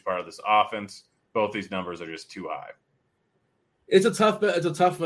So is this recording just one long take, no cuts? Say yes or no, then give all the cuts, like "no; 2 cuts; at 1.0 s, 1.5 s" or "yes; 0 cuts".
yes; 0 cuts